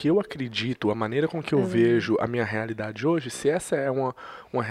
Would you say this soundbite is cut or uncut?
uncut